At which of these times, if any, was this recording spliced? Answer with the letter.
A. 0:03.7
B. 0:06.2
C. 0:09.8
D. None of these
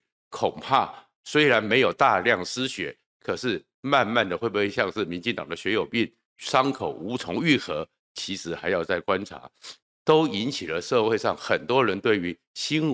C